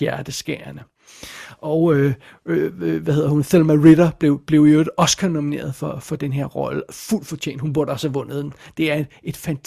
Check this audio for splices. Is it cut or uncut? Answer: uncut